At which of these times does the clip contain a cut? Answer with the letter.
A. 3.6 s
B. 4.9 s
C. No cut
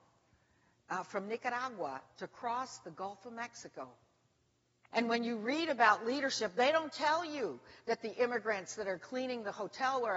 B